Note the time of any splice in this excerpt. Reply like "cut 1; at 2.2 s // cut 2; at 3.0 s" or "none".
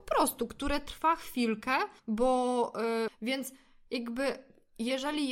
cut 1; at 2.0 s // cut 2; at 3.1 s